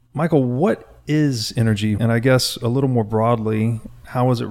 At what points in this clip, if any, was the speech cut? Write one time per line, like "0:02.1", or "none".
0:02.0